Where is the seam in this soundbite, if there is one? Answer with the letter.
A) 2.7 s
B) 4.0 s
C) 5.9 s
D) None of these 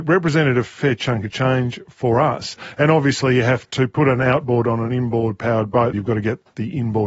C